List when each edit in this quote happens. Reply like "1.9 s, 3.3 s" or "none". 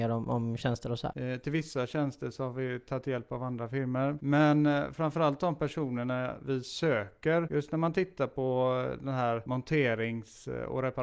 1.1 s